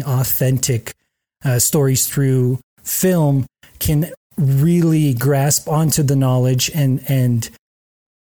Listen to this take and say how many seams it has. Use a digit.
0